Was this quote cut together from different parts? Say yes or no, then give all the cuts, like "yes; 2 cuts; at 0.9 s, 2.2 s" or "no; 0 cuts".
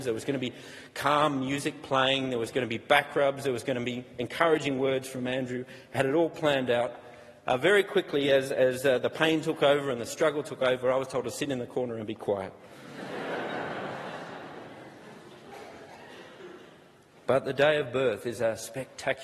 no; 0 cuts